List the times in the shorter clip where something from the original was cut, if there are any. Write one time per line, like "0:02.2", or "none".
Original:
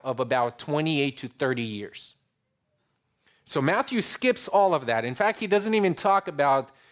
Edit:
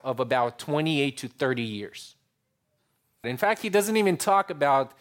0:03.2